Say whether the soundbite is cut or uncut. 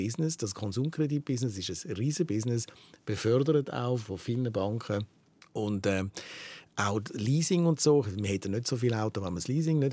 uncut